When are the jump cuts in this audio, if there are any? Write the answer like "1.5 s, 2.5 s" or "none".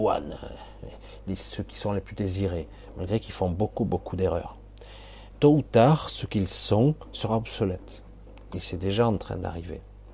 5.3 s